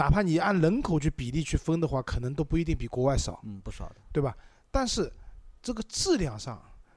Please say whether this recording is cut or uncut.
uncut